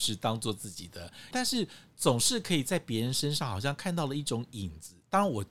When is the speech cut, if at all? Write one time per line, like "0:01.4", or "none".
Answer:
0:01.3